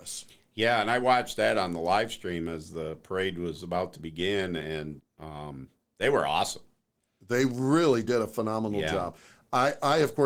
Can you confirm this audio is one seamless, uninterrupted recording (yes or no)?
no